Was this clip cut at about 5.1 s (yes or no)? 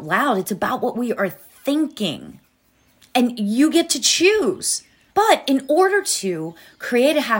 yes